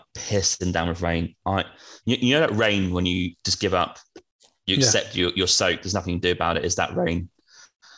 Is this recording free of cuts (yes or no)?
yes